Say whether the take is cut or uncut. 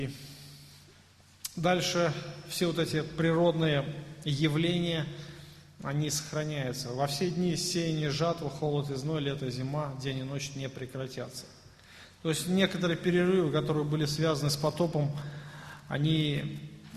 uncut